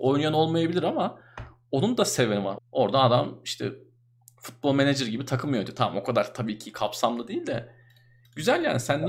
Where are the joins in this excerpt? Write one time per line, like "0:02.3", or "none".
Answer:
0:02.6